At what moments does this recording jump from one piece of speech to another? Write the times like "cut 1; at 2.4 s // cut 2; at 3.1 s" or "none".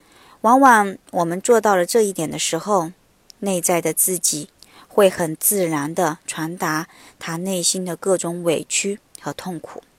none

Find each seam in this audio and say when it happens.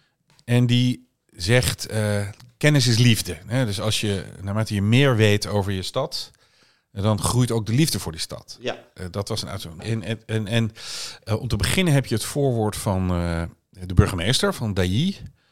cut 1; at 9.8 s

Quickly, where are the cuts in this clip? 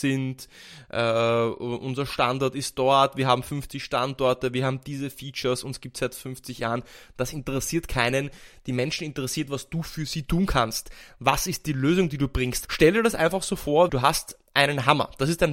cut 1; at 12.6 s // cut 2; at 13.9 s

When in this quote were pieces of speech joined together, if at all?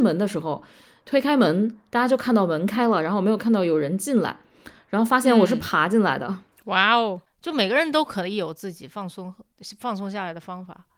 cut 1; at 7.3 s

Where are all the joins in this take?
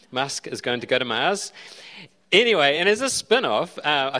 none

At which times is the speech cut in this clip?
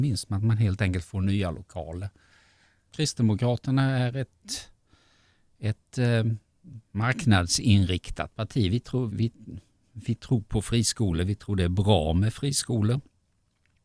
cut 1; at 2.9 s // cut 2; at 6.8 s // cut 3; at 9.1 s

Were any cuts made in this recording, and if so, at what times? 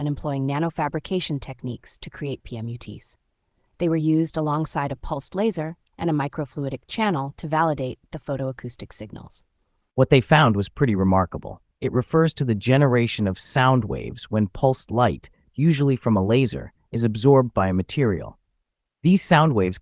cut 1; at 11.7 s

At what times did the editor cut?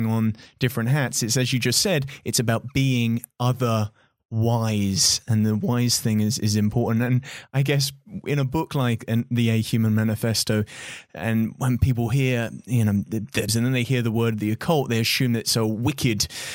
cut 1; at 13.5 s

